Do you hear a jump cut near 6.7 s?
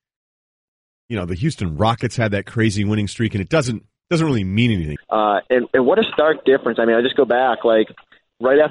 no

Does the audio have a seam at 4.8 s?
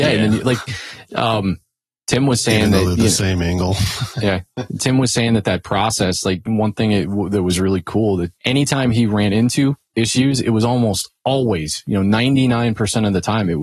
no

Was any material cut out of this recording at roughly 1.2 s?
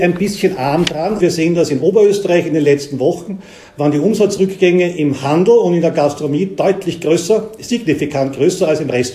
yes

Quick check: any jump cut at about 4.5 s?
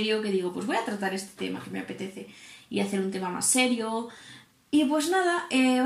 yes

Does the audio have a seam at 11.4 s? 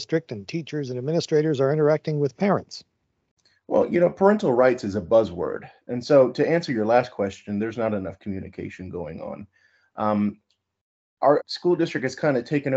yes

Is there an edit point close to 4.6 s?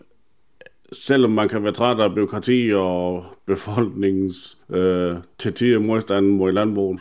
yes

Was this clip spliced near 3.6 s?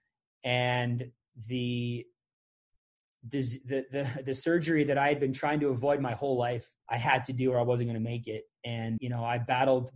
yes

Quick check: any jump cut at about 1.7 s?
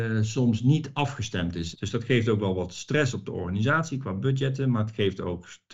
yes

